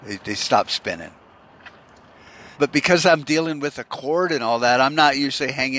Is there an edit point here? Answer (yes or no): yes